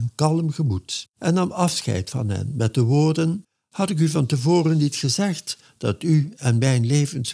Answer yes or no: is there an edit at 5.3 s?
no